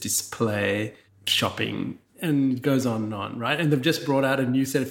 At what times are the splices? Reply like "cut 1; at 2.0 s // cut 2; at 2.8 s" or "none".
none